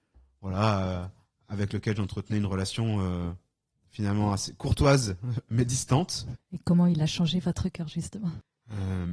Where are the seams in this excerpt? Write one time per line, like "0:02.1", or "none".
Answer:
0:06.3